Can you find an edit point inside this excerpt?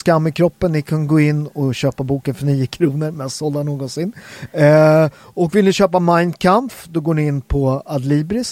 no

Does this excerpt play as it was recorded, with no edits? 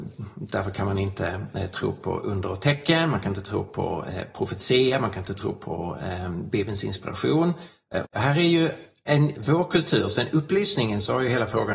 no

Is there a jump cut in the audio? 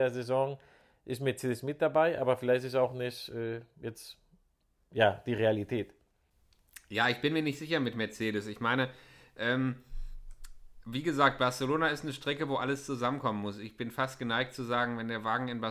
no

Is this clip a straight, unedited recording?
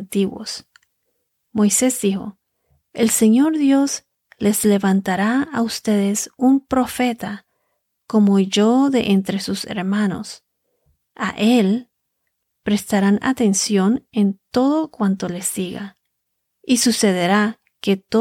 yes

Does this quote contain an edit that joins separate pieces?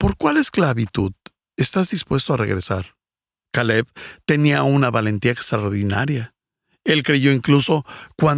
no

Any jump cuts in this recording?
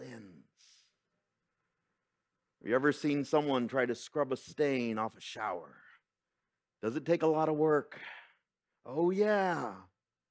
no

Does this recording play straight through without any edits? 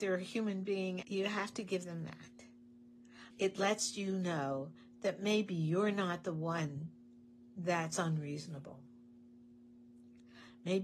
no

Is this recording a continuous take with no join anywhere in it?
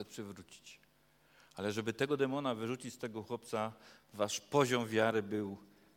yes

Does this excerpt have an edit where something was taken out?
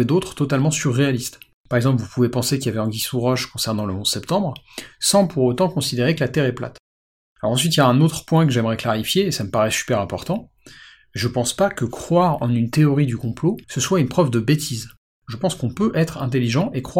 yes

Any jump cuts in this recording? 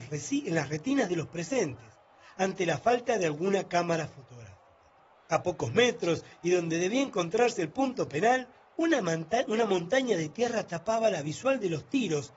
yes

